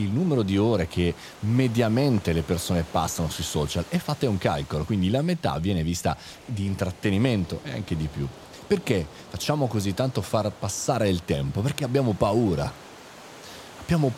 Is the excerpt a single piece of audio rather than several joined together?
yes; 0 cuts

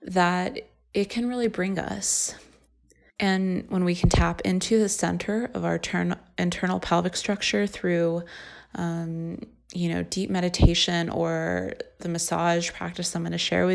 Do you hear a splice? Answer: yes; 1 cut; at 3.1 s

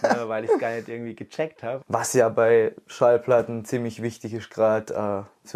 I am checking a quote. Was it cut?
yes; 1 cut; at 1.8 s

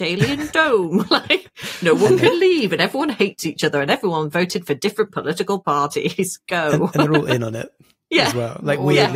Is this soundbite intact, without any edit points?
yes; 0 cuts

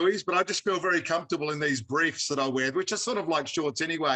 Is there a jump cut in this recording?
no; 0 cuts

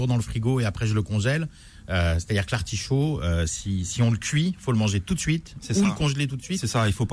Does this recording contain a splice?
no; 0 cuts

